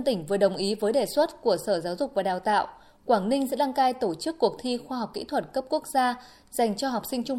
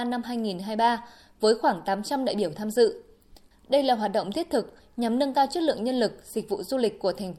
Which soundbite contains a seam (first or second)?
second